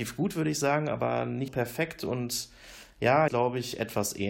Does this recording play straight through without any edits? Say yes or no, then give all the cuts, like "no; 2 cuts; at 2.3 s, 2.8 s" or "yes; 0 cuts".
no; 2 cuts; at 1.5 s, 3.3 s